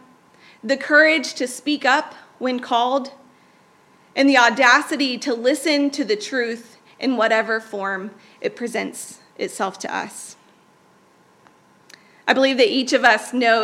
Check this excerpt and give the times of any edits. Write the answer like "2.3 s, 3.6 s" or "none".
none